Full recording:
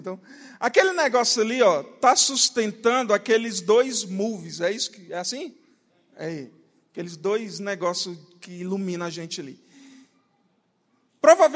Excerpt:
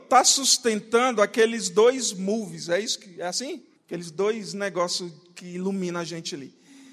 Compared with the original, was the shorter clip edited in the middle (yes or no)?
yes